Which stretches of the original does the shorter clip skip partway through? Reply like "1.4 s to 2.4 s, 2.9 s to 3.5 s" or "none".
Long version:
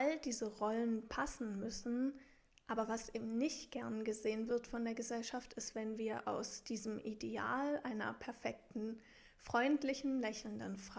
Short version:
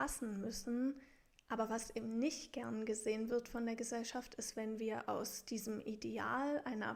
none